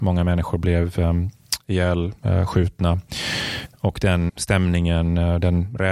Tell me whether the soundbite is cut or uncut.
cut